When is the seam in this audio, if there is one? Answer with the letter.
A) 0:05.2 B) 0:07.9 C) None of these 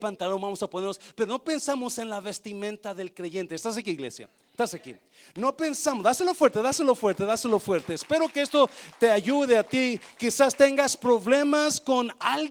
C